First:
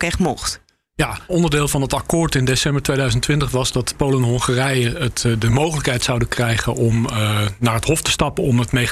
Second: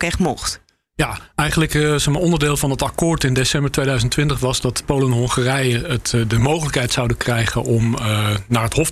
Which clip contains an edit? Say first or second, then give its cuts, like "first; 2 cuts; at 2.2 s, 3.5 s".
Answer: first; 1 cut; at 1.3 s